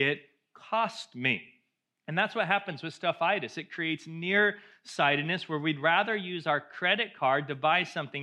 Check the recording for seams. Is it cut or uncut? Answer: uncut